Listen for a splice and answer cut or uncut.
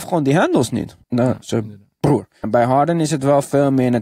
cut